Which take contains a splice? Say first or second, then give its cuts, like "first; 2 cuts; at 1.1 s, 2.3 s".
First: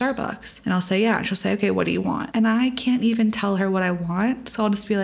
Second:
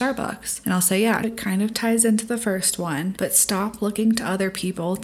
second; 1 cut; at 1.2 s